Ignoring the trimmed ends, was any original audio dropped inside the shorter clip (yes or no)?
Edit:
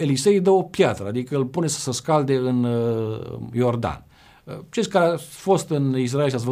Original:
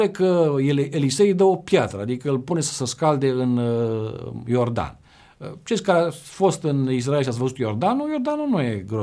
no